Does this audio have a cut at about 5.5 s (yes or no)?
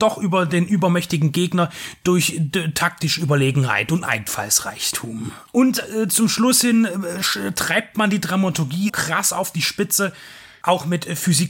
yes